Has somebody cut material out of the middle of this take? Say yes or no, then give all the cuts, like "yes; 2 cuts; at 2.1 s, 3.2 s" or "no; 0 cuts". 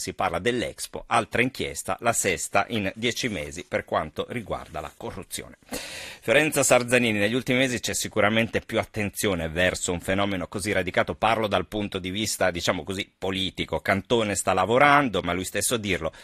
no; 0 cuts